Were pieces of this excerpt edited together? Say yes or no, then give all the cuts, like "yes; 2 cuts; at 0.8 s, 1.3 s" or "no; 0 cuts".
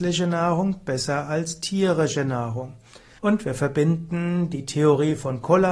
yes; 1 cut; at 3.2 s